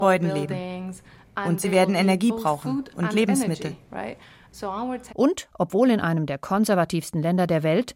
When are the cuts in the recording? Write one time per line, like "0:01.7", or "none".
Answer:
0:05.1